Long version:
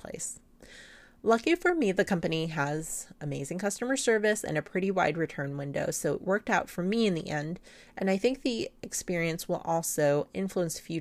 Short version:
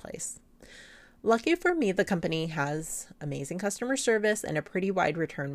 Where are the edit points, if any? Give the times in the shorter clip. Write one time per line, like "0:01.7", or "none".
none